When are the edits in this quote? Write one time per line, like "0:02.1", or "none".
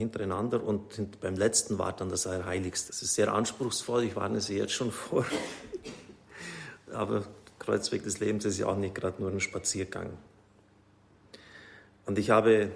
0:02.9